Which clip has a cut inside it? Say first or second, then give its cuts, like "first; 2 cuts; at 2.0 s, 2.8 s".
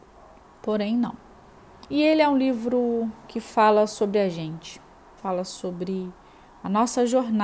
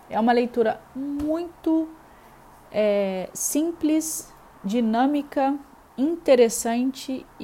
first; 2 cuts; at 1.9 s, 5.2 s